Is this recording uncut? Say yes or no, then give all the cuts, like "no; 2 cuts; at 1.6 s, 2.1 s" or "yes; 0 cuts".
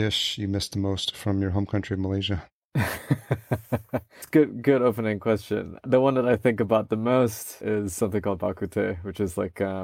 yes; 0 cuts